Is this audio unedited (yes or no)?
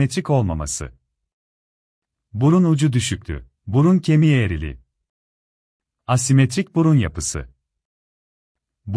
no